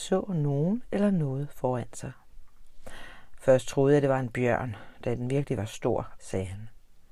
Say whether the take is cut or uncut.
cut